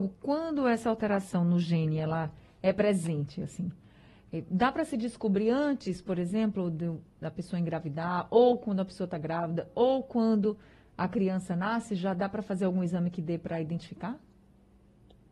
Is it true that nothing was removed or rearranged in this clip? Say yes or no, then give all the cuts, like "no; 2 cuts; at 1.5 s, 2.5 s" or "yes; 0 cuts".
yes; 0 cuts